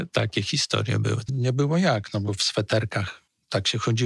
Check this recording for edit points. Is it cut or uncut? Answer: cut